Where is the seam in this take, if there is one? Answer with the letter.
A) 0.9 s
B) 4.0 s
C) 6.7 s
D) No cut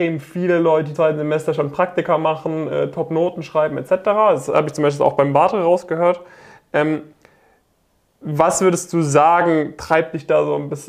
A